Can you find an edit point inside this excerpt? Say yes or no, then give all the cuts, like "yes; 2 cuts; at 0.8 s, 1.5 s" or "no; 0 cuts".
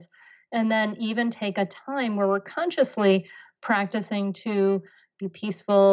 no; 0 cuts